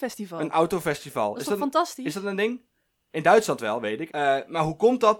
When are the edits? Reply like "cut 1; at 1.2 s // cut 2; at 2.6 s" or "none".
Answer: cut 1; at 4.1 s